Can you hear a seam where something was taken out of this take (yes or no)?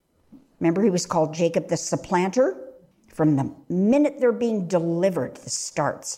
yes